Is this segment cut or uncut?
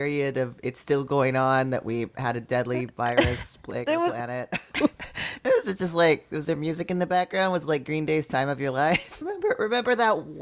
cut